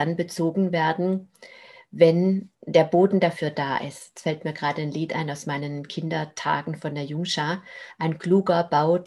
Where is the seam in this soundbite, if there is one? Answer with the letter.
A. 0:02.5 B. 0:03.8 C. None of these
A